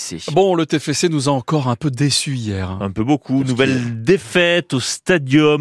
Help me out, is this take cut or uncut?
uncut